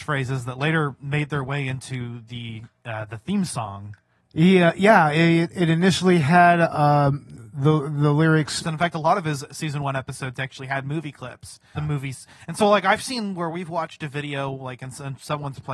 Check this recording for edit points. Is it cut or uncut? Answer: cut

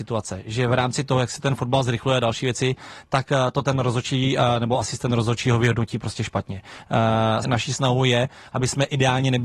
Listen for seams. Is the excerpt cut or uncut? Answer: cut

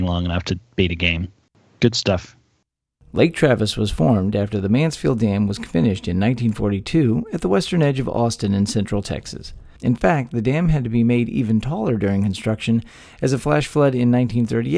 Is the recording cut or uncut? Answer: cut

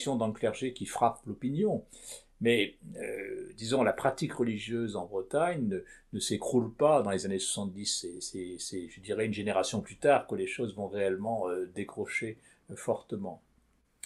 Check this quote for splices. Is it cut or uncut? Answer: uncut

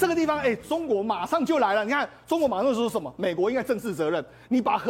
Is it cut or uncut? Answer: uncut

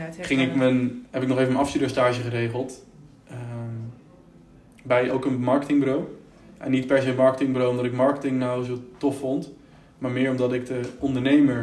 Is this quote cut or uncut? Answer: uncut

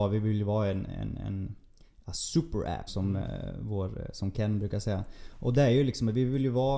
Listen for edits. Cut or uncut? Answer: cut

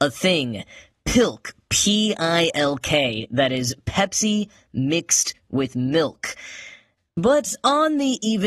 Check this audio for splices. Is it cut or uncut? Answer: cut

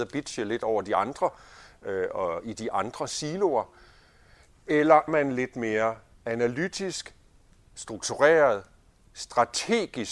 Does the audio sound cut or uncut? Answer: cut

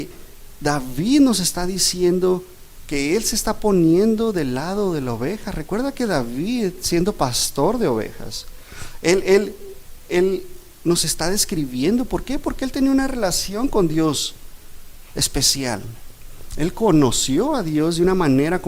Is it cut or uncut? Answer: cut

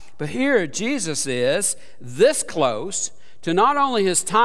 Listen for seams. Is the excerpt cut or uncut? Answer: uncut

